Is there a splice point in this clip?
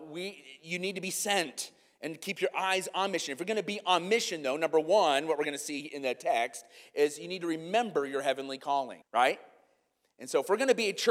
yes; 1 cut; at 9.0 s

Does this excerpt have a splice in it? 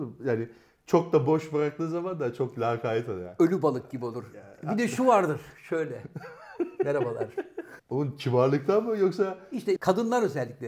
yes; 2 cuts; at 7.8 s, 9.8 s

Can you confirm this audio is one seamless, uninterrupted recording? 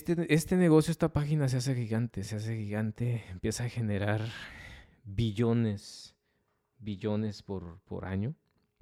yes; 0 cuts

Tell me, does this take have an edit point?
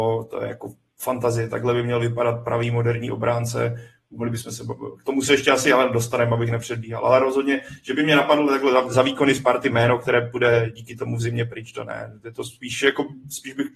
no; 0 cuts

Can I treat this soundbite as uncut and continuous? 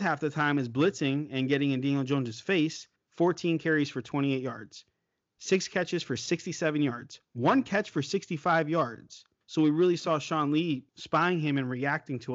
no; 3 cuts; at 3.0 s, 9.4 s, 10.9 s

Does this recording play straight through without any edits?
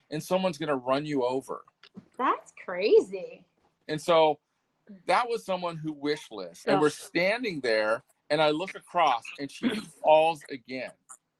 no; 2 cuts; at 3.8 s, 6.7 s

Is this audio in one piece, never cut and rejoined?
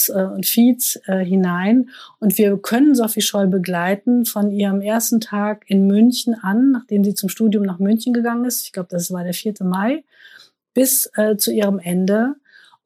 yes; 0 cuts

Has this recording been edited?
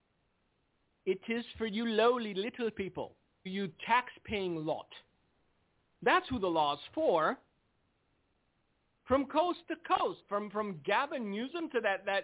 yes; 1 cut; at 3.5 s

